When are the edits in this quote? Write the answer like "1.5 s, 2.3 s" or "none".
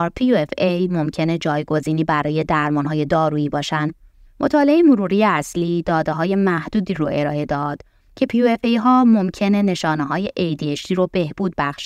4.3 s